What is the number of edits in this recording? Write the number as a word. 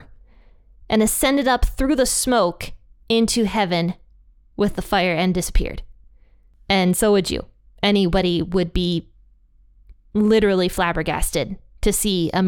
zero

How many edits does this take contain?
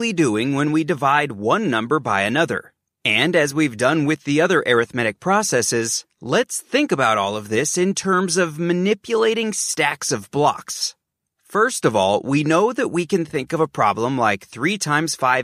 zero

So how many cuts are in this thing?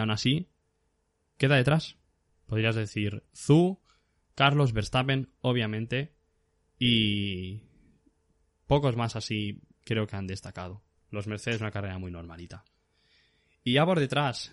one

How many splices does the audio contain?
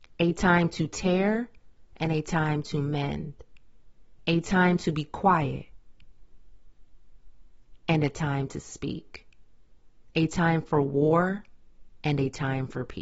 one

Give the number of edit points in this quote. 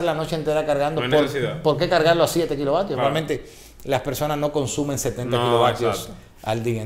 one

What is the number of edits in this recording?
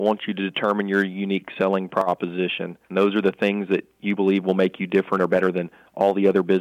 one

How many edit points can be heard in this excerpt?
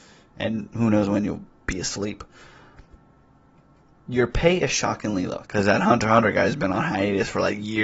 one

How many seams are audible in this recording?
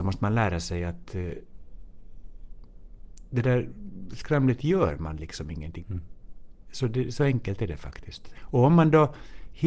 two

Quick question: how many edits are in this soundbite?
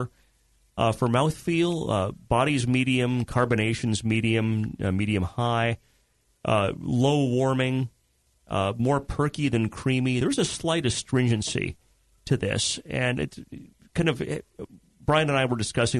zero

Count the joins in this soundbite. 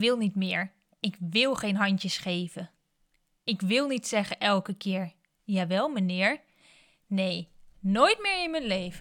one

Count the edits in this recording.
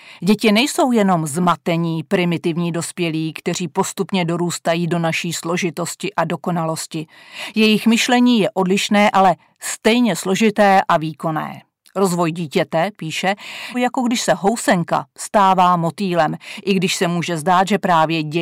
one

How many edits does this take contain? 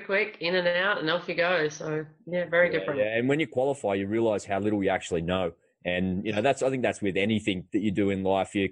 zero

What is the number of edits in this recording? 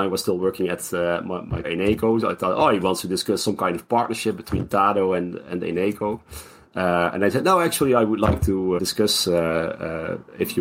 two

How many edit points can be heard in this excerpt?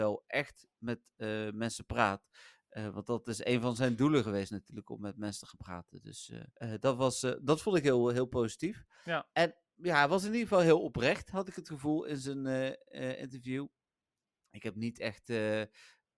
one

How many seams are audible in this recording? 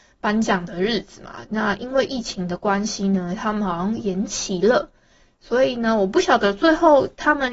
zero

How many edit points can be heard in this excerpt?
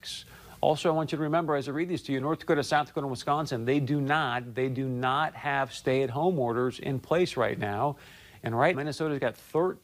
one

